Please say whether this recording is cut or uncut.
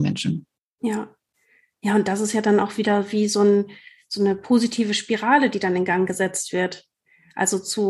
uncut